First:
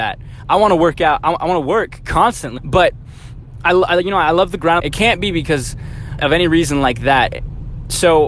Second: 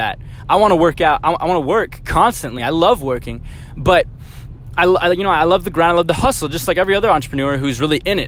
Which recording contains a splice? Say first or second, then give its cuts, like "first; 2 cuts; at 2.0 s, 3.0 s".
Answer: first; 3 cuts; at 2.6 s, 4.8 s, 6.2 s